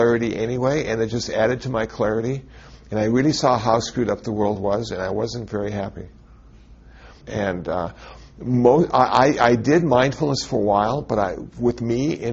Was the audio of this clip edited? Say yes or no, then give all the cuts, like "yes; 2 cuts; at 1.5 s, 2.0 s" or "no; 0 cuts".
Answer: yes; 1 cut; at 7.2 s